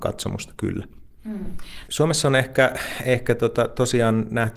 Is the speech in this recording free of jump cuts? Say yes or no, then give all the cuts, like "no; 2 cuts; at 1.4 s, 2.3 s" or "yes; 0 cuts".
no; 1 cut; at 1.8 s